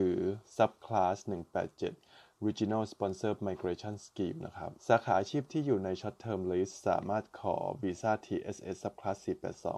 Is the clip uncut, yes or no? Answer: no